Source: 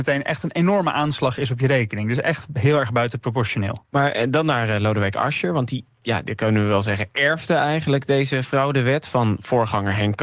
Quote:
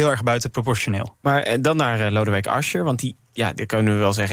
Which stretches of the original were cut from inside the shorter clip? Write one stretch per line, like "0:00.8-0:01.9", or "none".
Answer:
none